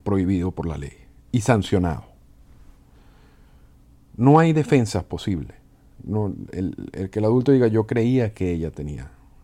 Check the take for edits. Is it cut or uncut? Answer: uncut